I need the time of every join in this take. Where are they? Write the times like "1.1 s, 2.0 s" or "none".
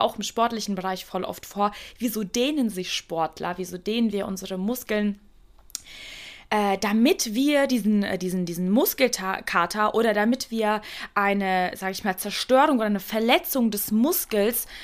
none